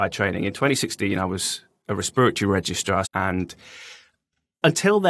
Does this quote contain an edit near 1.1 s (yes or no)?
no